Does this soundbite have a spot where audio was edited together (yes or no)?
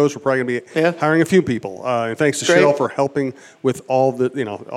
no